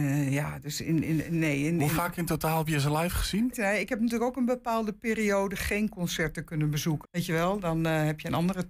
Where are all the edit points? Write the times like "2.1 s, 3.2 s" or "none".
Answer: 3.5 s, 7.0 s